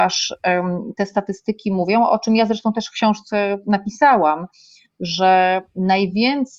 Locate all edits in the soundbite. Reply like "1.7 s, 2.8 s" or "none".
none